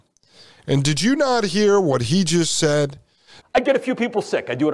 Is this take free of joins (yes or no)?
no